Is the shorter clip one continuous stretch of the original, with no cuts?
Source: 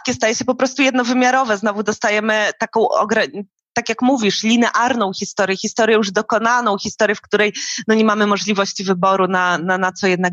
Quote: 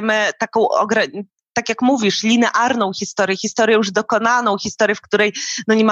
yes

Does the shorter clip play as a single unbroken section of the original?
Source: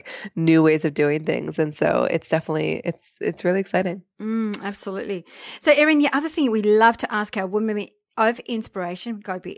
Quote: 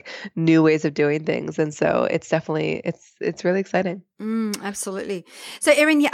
yes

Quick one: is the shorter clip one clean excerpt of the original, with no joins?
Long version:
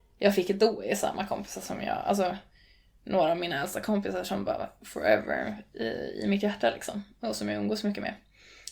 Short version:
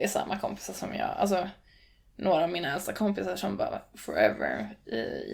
yes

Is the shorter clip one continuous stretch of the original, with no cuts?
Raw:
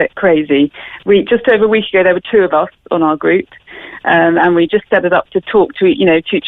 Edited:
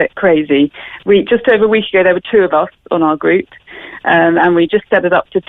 yes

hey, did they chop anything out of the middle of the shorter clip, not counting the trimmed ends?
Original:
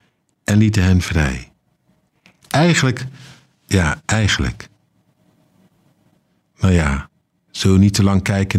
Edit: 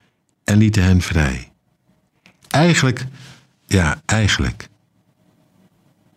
no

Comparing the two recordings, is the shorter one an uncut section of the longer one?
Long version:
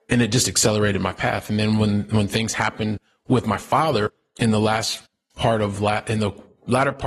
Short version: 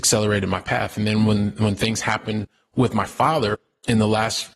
yes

